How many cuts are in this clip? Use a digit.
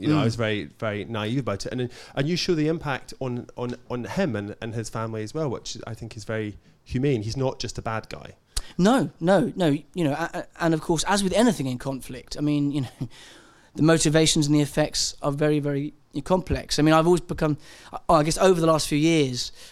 0